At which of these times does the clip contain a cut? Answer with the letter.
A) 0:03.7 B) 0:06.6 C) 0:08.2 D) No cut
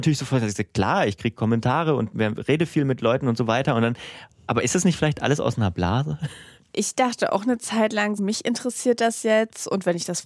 C